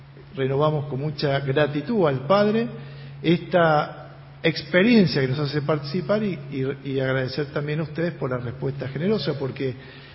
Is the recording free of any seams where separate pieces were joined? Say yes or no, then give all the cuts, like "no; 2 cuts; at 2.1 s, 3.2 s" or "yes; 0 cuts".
yes; 0 cuts